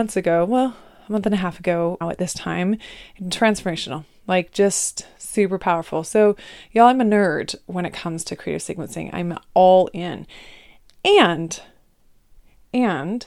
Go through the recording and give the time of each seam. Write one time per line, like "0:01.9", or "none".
0:02.0

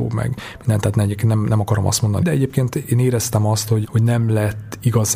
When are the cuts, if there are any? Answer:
0:02.2
0:03.8

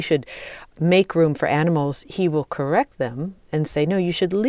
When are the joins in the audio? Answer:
none

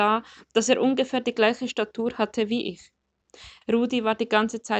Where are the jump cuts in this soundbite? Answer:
0:03.6

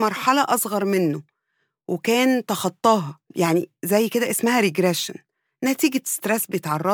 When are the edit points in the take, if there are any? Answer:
0:03.3

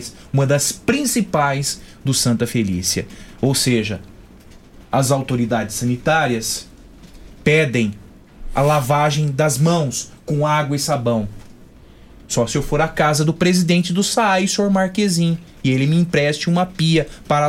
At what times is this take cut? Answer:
none

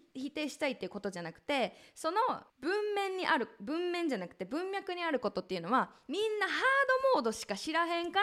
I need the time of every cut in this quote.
0:02.5

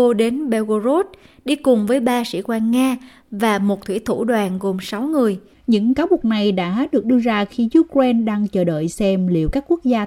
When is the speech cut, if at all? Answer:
0:05.5

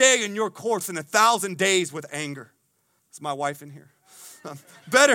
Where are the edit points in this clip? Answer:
0:03.0

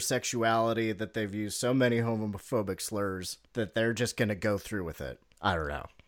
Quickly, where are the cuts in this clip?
0:03.5

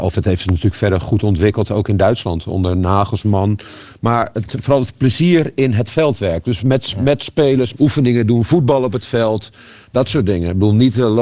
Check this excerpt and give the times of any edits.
0:07.7

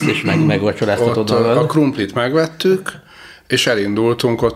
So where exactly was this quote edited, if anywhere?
none

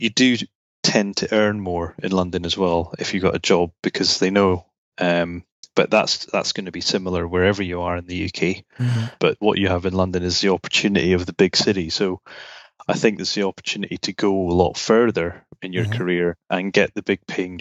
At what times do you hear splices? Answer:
0:04.9
0:09.2

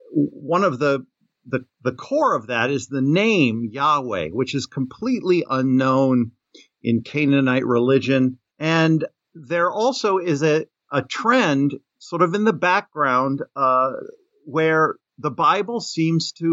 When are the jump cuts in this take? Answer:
0:08.5

